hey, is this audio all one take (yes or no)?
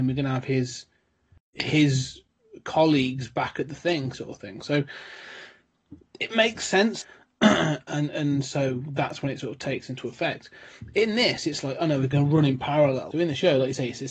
no